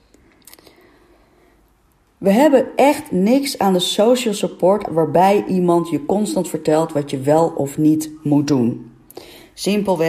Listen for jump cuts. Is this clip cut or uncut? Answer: cut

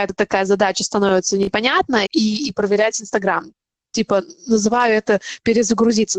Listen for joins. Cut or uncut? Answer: cut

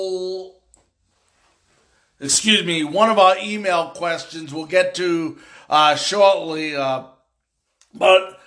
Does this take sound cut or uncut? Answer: uncut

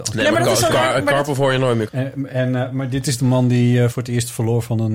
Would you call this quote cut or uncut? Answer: cut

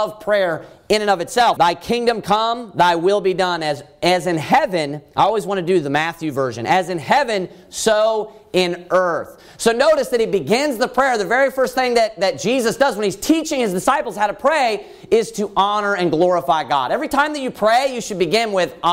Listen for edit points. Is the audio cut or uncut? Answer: cut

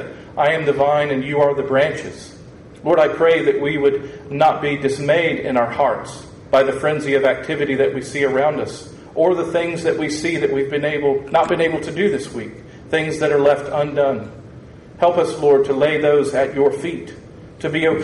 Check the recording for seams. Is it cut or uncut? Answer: cut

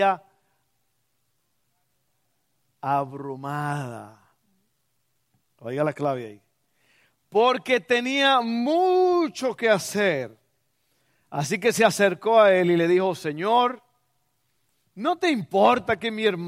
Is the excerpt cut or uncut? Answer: uncut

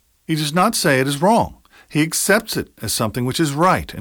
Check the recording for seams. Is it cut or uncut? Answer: uncut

